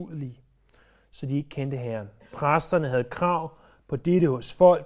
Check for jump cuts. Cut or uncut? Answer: uncut